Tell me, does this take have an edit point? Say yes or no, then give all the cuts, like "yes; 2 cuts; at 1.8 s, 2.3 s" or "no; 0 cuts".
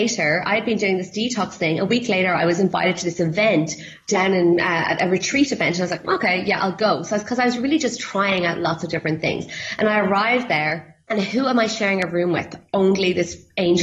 no; 0 cuts